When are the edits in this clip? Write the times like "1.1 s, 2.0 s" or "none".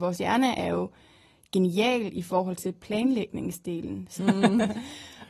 4.2 s